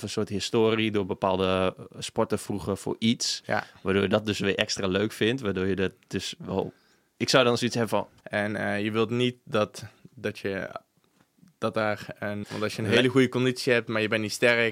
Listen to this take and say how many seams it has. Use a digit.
2